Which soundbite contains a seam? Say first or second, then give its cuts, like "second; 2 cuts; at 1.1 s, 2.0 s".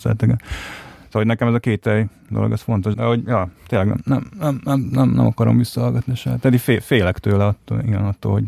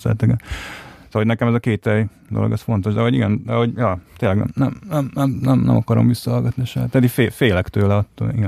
first; 1 cut; at 2.9 s